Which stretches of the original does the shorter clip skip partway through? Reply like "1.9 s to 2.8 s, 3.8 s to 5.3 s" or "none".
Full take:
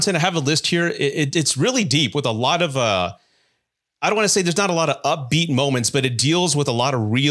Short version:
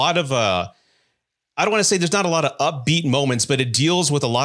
none

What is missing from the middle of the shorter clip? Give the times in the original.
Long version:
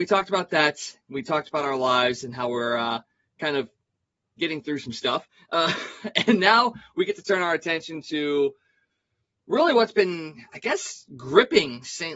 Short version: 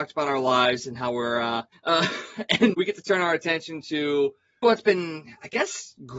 3.1 s to 5.4 s, 6.4 s to 6.9 s, 8.8 s to 9.7 s

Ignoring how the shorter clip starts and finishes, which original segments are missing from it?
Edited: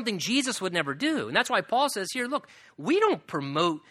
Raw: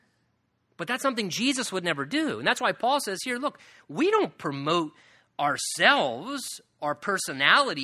none

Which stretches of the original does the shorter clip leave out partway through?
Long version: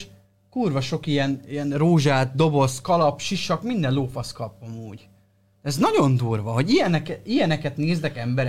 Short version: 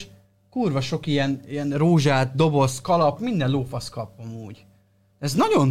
3.2 s to 3.6 s

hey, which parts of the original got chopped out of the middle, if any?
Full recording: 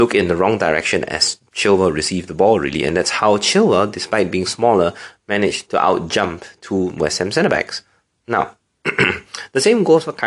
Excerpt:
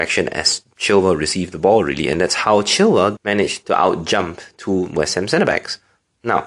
3.9 s to 5.2 s

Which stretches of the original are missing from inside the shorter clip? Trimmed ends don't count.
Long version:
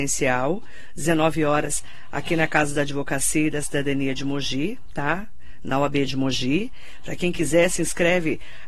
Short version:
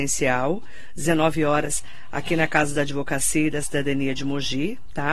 none

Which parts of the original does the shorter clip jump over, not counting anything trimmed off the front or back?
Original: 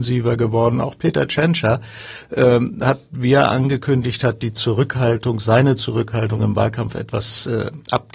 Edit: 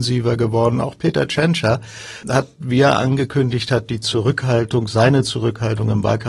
2.2 s to 2.8 s

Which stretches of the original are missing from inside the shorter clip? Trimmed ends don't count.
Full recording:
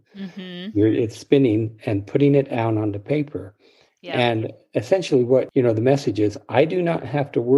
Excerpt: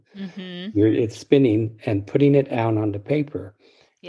none

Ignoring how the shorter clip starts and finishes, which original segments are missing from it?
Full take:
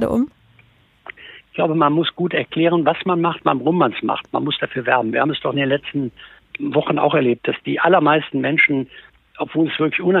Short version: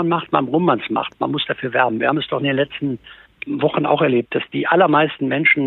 none

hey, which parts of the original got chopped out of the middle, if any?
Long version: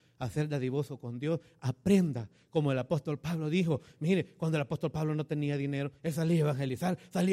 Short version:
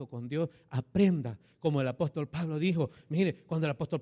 none

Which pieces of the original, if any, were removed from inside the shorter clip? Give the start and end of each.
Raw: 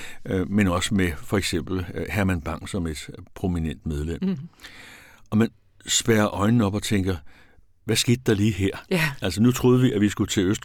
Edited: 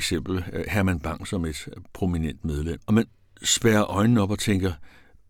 4.2 s to 5.2 s

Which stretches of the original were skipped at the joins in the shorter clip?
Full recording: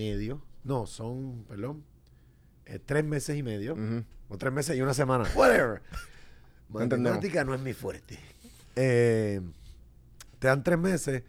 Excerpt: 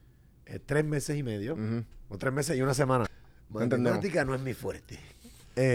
5.3 s to 6.3 s

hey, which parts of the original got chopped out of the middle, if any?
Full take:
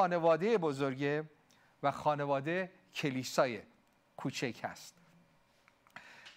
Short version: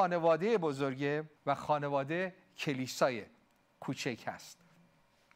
1.4 s to 1.7 s

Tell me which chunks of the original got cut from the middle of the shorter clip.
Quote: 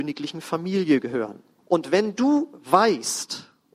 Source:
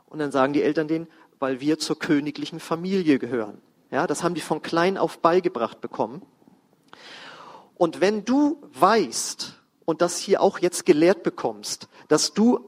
3.8 s to 7.7 s

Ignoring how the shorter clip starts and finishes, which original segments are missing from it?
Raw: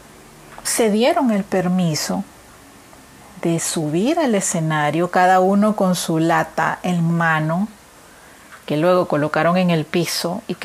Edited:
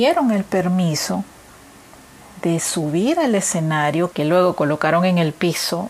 5.1 s to 8.6 s

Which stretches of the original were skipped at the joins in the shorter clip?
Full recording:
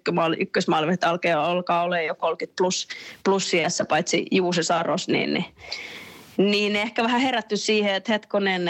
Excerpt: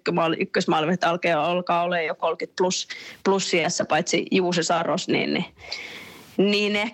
none

